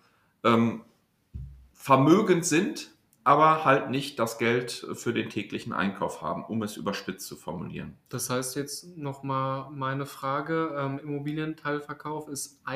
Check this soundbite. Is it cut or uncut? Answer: uncut